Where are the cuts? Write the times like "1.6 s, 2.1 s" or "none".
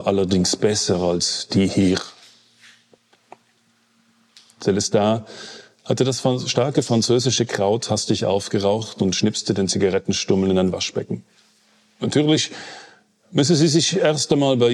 none